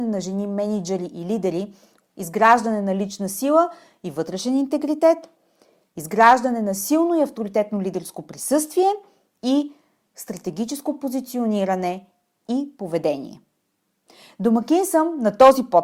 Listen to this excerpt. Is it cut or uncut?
cut